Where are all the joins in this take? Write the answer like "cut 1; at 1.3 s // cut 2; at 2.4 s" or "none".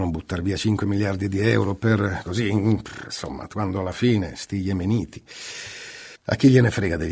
cut 1; at 6.2 s

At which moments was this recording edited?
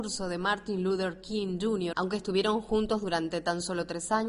cut 1; at 1.9 s

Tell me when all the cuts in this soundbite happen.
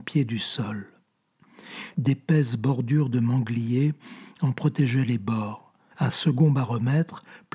cut 1; at 1.9 s // cut 2; at 5.9 s

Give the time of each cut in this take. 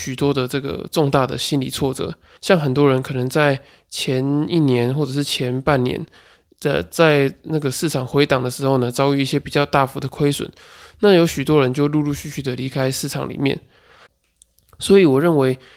cut 1; at 2.4 s

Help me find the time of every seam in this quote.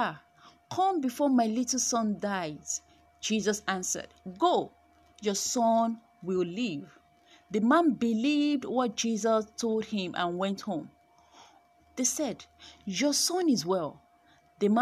cut 1; at 11.8 s

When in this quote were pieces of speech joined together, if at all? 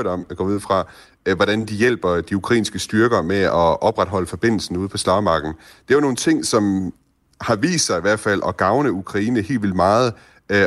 none

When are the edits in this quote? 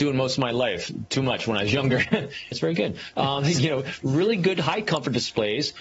cut 1; at 2.5 s

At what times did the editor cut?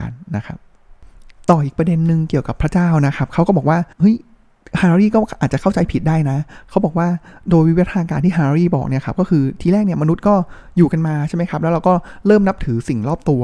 cut 1; at 3.9 s

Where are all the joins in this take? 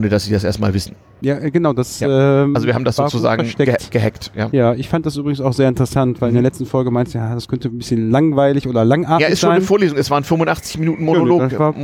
none

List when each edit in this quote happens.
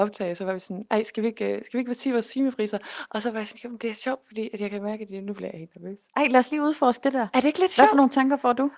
none

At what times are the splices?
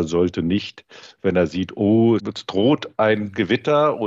cut 1; at 2.2 s

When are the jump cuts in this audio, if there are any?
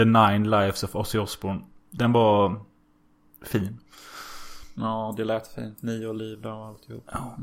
none

